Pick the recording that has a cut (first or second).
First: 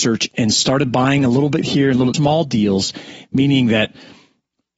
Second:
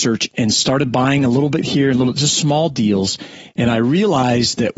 first